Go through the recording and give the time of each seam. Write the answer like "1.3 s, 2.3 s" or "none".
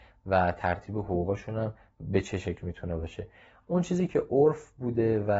none

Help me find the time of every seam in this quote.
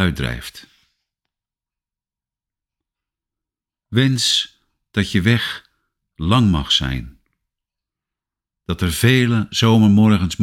none

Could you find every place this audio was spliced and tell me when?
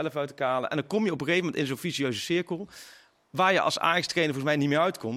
none

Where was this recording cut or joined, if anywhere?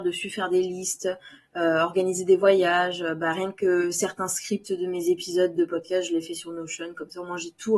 none

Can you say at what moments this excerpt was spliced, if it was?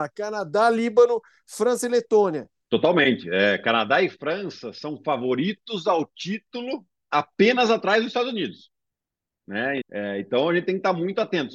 2.6 s, 9.8 s

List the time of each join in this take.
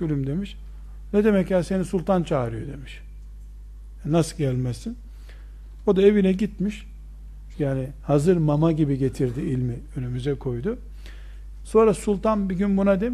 7.5 s, 11.6 s

